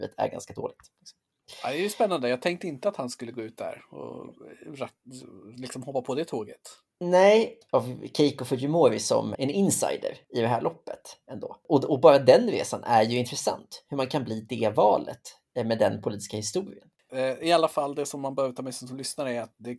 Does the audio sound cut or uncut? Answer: cut